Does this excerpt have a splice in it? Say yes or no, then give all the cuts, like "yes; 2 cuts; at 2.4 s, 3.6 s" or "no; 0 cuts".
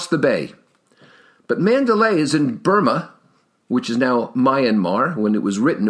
no; 0 cuts